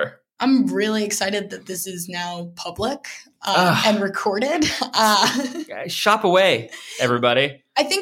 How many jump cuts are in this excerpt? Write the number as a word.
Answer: zero